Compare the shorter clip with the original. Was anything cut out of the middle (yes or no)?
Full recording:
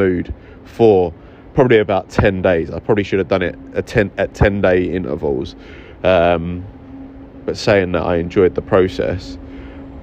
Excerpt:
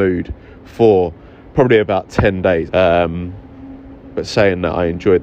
yes